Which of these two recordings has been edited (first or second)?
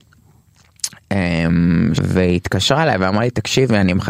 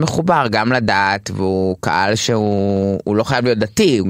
first